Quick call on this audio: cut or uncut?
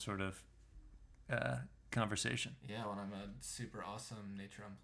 uncut